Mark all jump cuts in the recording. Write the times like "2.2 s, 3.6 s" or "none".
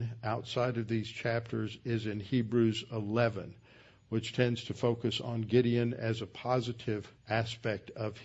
7.2 s